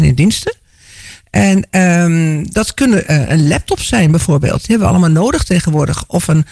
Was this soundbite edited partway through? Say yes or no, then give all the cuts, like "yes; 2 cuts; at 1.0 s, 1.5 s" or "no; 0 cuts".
no; 0 cuts